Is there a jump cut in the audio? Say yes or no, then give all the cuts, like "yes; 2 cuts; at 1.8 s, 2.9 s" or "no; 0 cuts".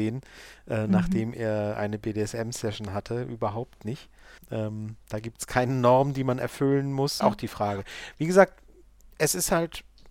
yes; 2 cuts; at 4.4 s, 7.2 s